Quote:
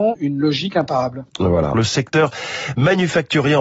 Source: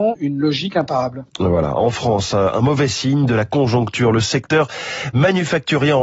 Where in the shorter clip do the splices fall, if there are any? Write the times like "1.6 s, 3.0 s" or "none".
1.7 s